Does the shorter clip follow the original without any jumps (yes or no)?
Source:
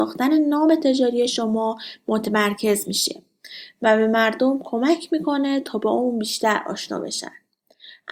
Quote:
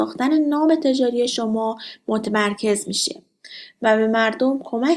yes